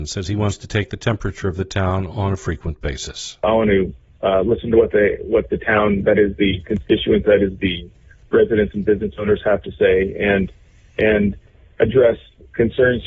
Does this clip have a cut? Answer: no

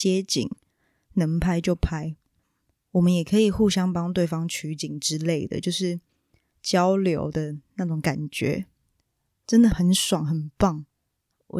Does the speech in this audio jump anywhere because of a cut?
yes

